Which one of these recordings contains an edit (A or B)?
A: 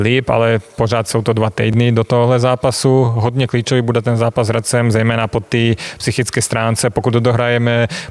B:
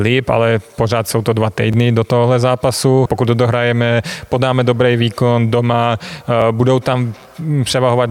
B